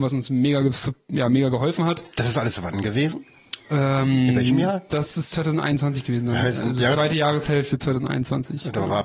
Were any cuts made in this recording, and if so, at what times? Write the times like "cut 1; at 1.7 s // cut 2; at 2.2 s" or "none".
none